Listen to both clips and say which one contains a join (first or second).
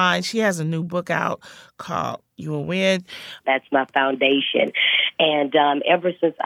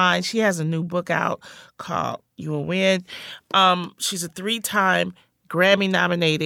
first